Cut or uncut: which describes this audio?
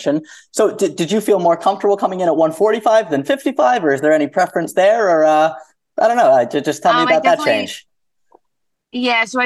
uncut